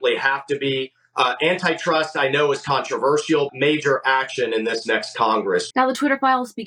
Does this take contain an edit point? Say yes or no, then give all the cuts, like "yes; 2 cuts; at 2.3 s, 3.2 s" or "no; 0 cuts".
yes; 2 cuts; at 3.5 s, 5.7 s